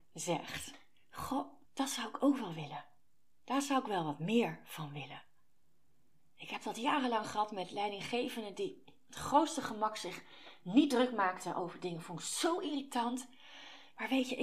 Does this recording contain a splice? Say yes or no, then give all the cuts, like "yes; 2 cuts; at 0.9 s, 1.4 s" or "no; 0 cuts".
yes; 1 cut; at 1.7 s